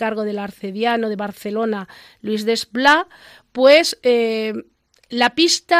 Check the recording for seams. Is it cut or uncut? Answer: uncut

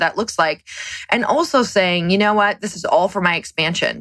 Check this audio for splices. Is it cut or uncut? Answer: uncut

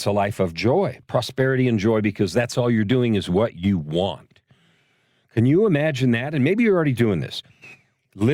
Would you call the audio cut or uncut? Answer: cut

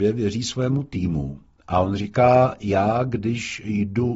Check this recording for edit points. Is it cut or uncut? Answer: uncut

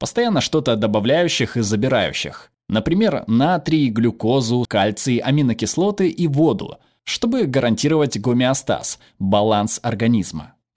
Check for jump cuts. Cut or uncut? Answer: cut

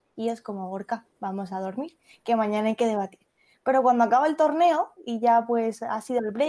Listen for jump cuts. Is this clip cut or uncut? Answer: uncut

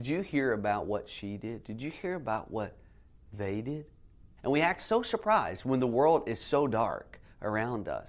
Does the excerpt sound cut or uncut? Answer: cut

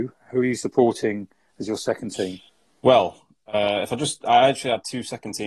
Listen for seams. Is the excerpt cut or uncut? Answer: uncut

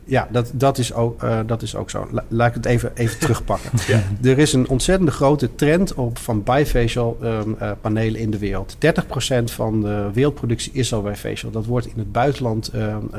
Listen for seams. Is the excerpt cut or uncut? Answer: uncut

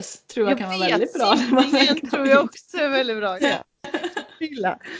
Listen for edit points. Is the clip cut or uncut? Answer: cut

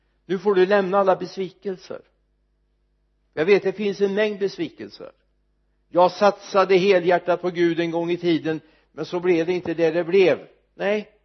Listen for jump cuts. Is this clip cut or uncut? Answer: uncut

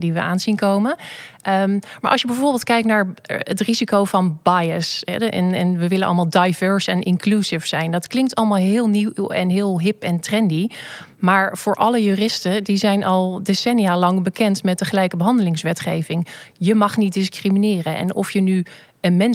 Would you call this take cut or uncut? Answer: uncut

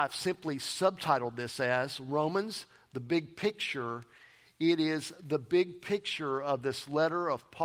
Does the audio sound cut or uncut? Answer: uncut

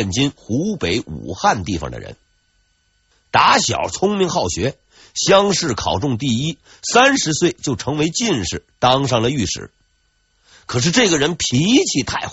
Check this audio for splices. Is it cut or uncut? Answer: uncut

